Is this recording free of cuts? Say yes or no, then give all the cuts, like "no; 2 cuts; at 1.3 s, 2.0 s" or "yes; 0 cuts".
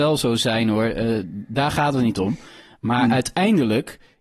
yes; 0 cuts